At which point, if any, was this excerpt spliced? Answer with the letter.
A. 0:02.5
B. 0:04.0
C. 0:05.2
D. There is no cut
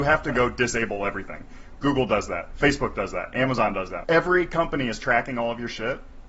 B